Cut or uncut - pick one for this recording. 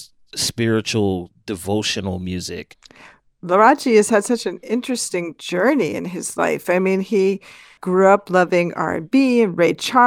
uncut